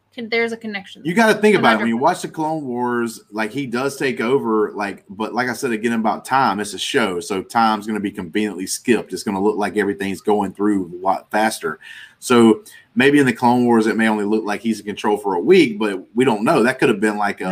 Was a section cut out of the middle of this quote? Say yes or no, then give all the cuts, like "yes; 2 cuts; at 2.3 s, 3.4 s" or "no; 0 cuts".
no; 0 cuts